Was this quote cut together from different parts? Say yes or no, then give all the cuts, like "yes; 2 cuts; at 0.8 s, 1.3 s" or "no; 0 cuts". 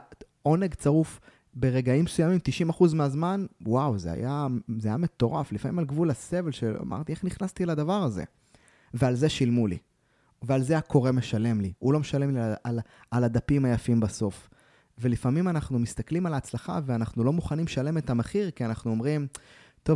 no; 0 cuts